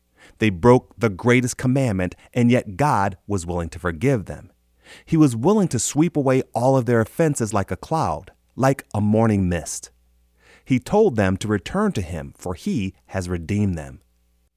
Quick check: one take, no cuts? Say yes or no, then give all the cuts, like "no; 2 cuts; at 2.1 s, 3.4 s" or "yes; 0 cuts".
yes; 0 cuts